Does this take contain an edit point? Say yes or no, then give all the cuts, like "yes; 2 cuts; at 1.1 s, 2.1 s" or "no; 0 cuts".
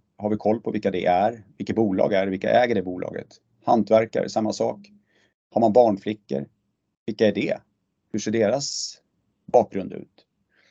no; 0 cuts